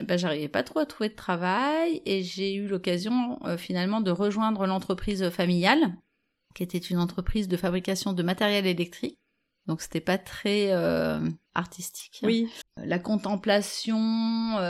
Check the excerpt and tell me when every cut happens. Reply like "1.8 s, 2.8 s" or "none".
11.5 s, 12.6 s